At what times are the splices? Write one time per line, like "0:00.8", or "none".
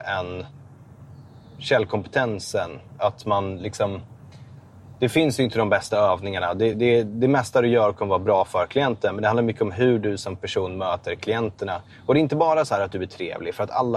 none